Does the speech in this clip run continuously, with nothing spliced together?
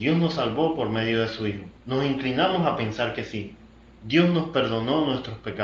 no; 2 cuts; at 1.8 s, 3.9 s

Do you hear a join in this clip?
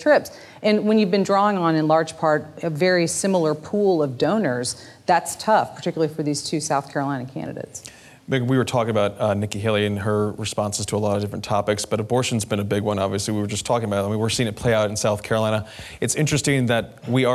no; 0 cuts

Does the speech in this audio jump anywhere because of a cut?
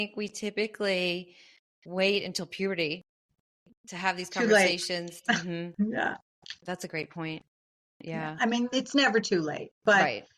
no; 0 cuts

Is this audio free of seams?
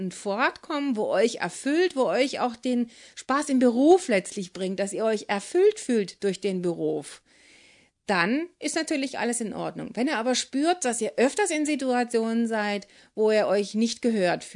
yes; 0 cuts

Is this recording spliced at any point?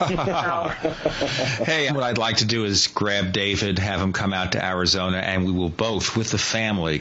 yes; 1 cut; at 1.9 s

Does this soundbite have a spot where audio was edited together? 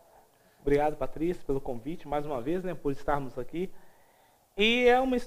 no; 0 cuts

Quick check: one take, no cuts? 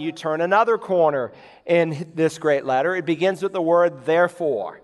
yes; 0 cuts

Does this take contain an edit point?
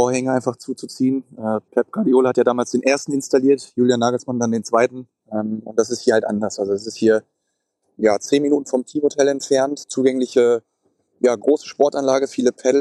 yes; 1 cut; at 5.2 s

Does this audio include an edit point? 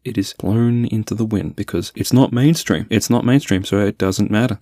yes; 1 cut; at 2.9 s

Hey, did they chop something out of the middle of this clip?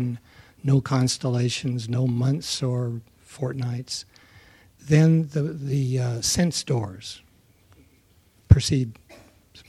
no; 0 cuts

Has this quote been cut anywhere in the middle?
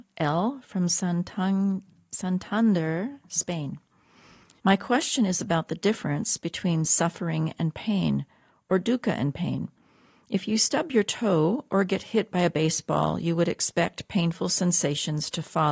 yes; 1 cut; at 4.6 s

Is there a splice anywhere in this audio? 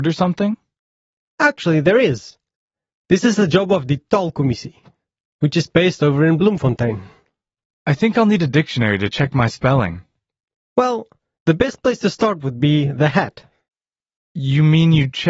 no; 0 cuts

